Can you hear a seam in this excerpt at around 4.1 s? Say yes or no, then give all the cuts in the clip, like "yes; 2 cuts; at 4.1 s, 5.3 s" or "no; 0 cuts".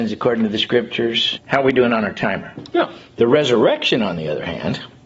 no; 2 cuts; at 1.3 s, 2.7 s